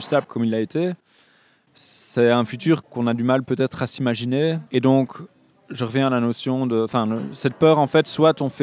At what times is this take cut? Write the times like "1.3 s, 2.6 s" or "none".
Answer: 4.7 s